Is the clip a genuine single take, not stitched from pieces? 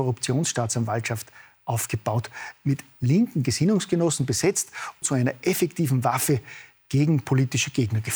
no; 1 cut; at 5.0 s

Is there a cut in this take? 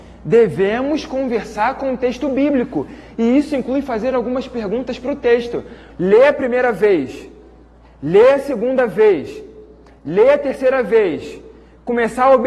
yes; 1 cut; at 5.9 s

